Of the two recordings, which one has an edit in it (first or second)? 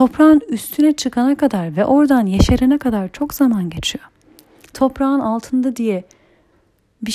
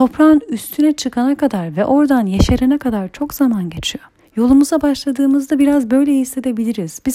second